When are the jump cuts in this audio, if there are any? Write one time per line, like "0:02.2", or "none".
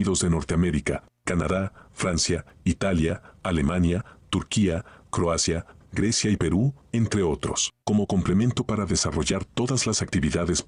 0:05.8
0:07.8